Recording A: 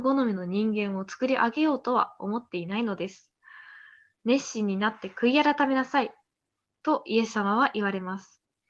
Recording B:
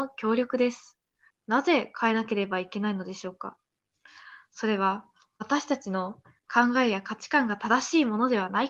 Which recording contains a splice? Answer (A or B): B